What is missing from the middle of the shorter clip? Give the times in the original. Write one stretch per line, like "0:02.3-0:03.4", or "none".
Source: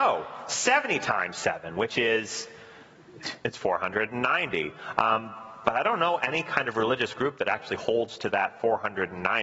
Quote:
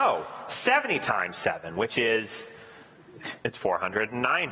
none